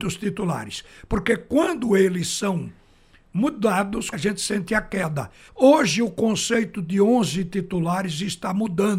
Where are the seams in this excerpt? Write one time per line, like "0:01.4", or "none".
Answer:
0:04.1
0:05.5